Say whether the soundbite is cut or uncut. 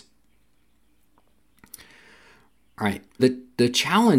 cut